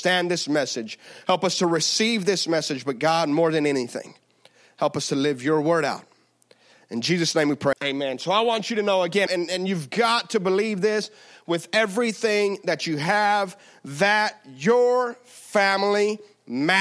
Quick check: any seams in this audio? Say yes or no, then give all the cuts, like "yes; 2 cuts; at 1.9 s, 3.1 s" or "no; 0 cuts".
yes; 2 cuts; at 7.7 s, 9.3 s